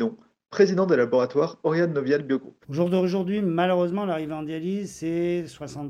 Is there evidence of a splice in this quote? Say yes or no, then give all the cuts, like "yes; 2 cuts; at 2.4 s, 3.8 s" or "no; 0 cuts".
yes; 1 cut; at 2.6 s